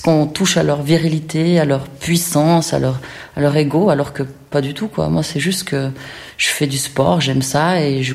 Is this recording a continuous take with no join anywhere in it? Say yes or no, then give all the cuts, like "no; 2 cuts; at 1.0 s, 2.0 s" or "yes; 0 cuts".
yes; 0 cuts